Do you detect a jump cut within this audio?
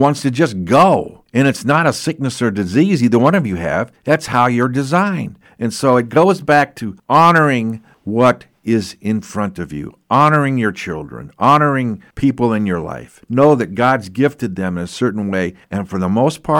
no; 0 cuts

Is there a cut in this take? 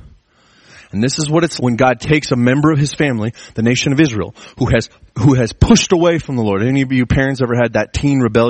yes; 1 cut; at 1.6 s

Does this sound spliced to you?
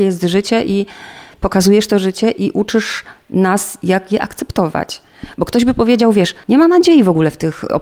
no; 0 cuts

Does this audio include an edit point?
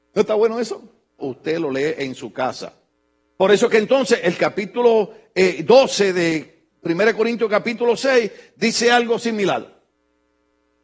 yes; 2 cuts; at 1.2 s, 3.3 s

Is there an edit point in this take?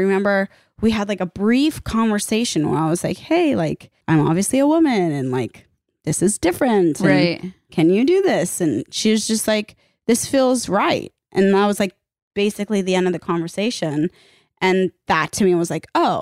yes; 1 cut; at 4.0 s

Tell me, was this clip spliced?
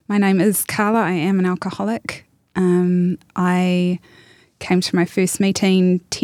no; 0 cuts

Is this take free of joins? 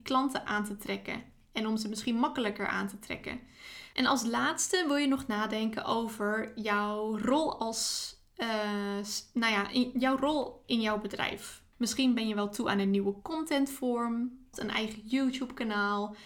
no; 3 cuts; at 3.9 s, 11.7 s, 14.5 s

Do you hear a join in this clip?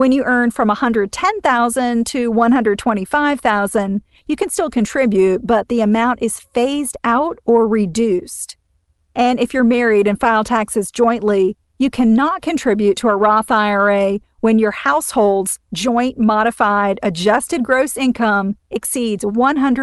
no; 0 cuts

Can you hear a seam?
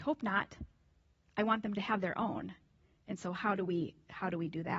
no; 0 cuts

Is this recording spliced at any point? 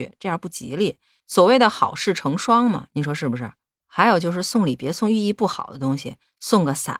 no; 0 cuts

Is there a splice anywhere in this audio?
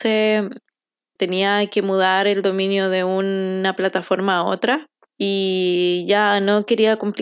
yes; 1 cut; at 1.2 s

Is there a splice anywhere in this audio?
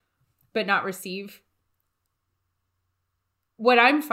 no; 0 cuts

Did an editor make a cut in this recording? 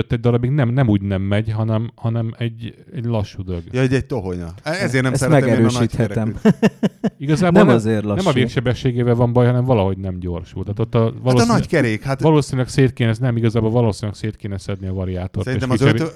no; 0 cuts

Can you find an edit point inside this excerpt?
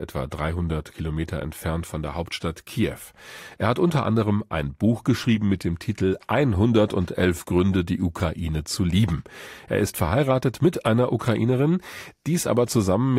no; 0 cuts

